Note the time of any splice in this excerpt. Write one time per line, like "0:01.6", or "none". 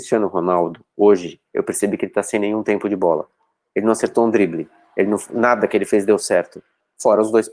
none